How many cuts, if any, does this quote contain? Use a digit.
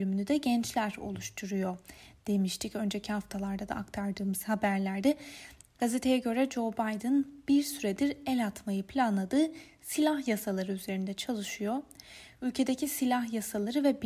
1